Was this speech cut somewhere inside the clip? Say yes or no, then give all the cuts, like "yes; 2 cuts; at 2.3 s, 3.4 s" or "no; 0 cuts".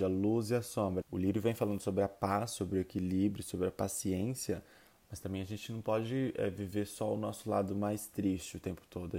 yes; 1 cut; at 1.0 s